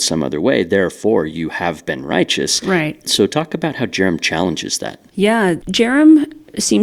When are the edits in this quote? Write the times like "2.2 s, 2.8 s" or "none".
3.1 s